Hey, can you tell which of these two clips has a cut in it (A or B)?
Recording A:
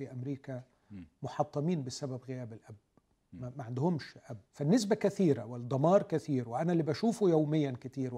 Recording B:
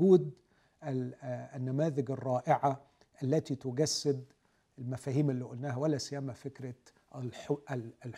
A